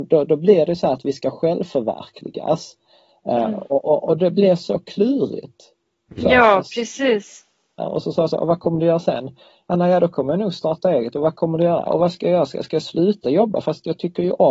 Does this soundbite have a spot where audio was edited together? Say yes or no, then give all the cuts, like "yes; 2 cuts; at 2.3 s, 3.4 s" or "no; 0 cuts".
yes; 2 cuts; at 7.8 s, 11.9 s